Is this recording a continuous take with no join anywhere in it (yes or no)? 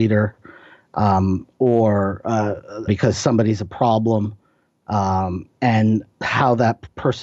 no